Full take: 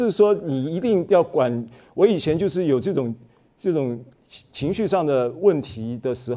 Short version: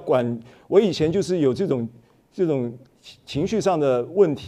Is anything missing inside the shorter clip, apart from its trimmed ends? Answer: no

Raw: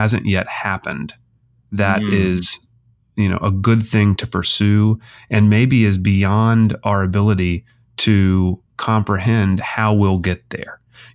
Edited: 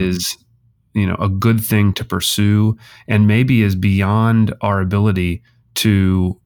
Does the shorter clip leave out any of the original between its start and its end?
no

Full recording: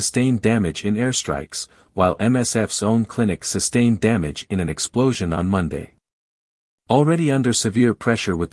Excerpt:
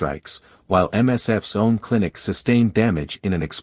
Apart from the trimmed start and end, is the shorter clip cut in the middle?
no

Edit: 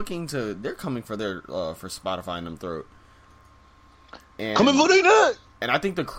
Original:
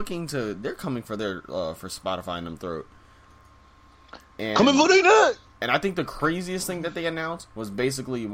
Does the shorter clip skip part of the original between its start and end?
no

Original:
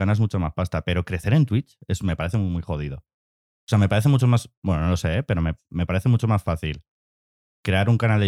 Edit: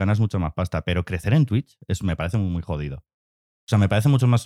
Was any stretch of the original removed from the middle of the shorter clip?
no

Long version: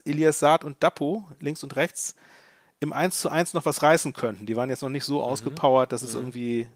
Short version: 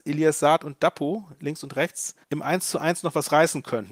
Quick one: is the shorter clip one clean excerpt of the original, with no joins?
no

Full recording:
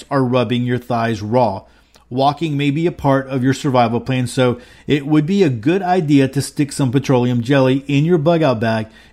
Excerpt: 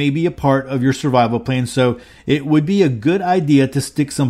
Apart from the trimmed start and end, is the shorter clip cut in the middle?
no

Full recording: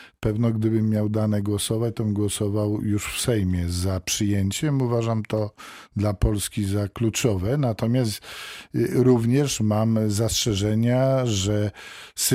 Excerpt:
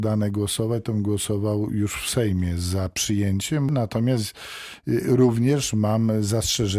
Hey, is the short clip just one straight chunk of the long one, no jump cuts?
no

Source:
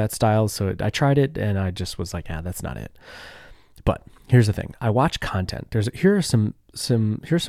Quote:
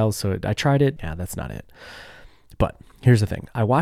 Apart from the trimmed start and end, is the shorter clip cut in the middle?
yes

